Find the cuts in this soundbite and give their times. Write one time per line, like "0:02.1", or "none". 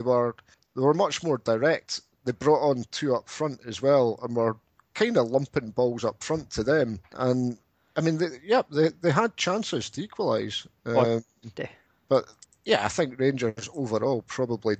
0:07.0